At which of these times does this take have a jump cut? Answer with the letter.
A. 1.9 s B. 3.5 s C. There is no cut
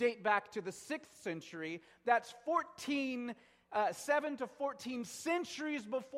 C